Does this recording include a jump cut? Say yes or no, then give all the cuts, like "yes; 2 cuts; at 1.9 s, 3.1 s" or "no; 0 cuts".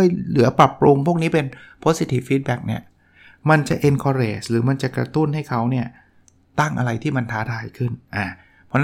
no; 0 cuts